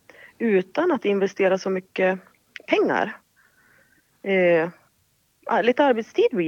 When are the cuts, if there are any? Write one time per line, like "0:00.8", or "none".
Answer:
none